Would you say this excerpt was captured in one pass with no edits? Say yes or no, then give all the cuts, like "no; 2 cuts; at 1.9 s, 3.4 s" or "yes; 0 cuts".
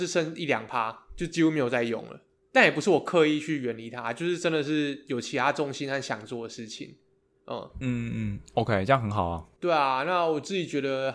no; 1 cut; at 7.8 s